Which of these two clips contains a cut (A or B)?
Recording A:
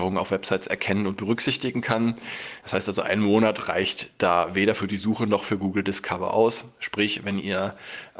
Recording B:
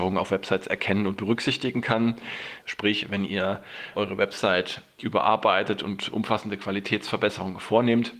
B